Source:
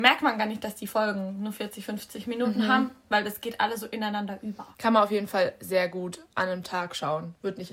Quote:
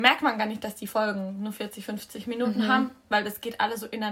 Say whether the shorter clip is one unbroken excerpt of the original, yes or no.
yes